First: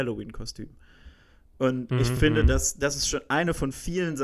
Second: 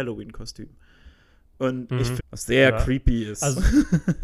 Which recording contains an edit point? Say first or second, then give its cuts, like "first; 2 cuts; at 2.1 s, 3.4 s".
second; 1 cut; at 2.2 s